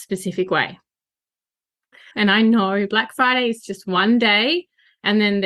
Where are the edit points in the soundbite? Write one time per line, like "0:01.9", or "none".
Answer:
0:02.1